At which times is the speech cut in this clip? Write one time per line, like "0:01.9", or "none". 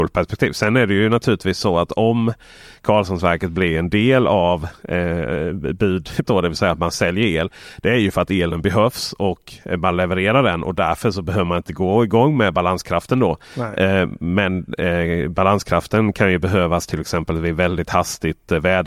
0:06.2